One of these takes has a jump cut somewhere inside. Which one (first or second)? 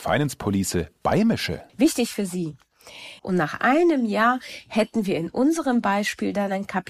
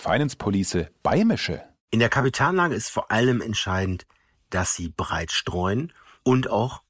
first